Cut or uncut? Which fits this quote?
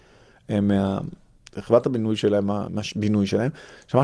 uncut